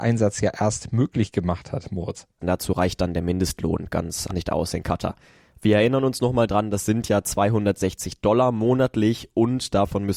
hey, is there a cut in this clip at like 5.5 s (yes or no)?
no